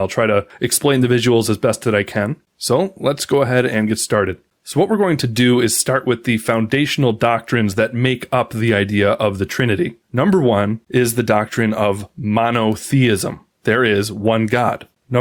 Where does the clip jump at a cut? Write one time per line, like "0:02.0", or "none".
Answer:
0:10.0